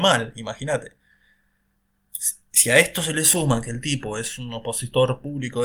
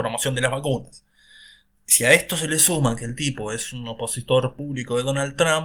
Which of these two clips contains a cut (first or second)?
second